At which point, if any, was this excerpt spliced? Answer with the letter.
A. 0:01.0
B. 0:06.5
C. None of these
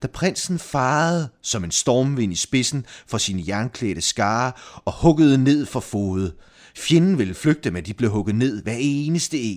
C